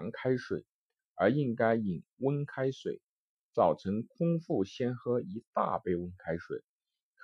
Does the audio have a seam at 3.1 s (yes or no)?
no